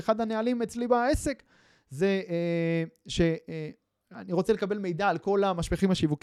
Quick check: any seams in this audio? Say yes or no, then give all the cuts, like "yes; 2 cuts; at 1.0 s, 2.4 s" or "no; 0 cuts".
no; 0 cuts